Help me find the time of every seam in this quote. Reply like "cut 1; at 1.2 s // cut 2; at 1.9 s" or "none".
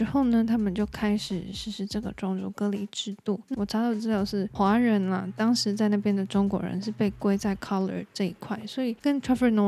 cut 1; at 3.5 s